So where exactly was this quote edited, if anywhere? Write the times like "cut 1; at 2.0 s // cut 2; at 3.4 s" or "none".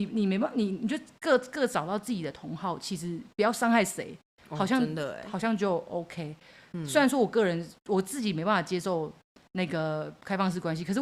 none

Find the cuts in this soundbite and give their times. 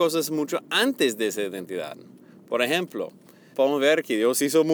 cut 1; at 3.5 s

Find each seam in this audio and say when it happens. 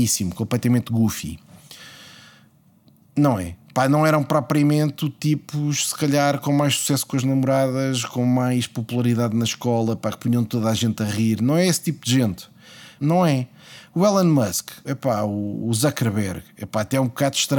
cut 1; at 13.0 s // cut 2; at 14.8 s

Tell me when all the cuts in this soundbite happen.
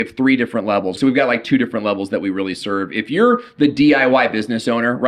cut 1; at 1.0 s

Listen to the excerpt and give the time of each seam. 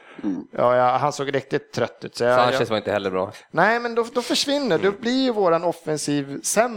none

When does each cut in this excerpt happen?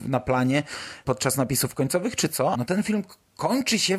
cut 1; at 2.5 s

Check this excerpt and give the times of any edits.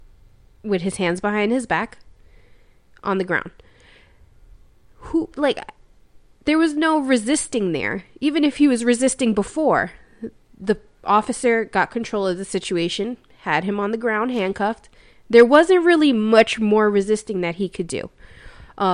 cut 1; at 5.3 s

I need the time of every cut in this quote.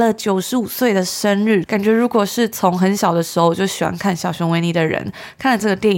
cut 1; at 1.6 s

